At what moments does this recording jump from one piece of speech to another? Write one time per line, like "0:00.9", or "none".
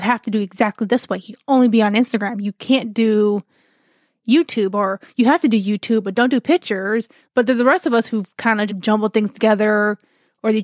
0:07.3
0:08.7